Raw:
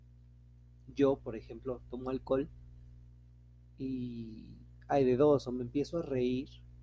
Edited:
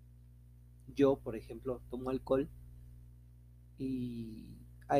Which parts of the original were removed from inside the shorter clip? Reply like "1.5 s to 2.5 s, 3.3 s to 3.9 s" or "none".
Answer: none